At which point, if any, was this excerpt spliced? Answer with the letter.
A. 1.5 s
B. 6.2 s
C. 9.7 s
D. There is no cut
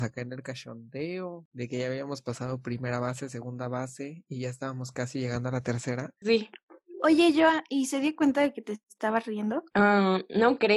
B